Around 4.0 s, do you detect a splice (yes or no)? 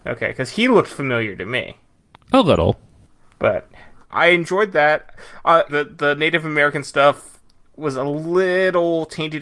yes